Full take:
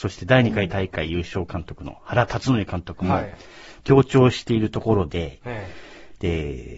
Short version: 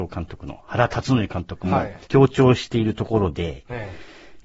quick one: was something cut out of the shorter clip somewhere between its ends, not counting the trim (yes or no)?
yes